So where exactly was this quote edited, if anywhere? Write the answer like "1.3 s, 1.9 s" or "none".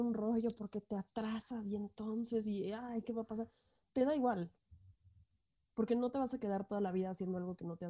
none